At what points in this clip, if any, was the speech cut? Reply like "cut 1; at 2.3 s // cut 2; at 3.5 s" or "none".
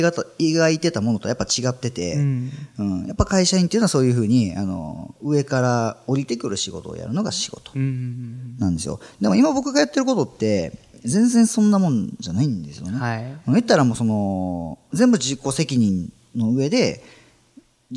cut 1; at 14.9 s